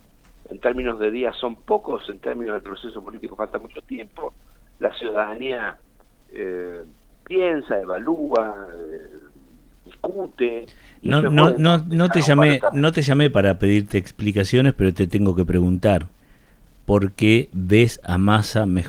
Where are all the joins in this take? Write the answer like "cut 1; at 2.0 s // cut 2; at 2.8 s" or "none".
none